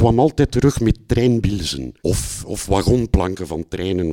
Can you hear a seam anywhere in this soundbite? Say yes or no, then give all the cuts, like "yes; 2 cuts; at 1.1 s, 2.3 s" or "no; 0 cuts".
yes; 1 cut; at 2.0 s